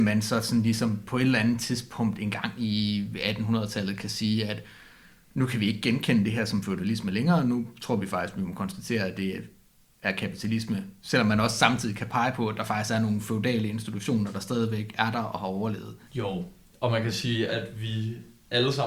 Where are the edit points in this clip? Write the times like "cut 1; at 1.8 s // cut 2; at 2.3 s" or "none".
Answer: cut 1; at 16.1 s // cut 2; at 17.5 s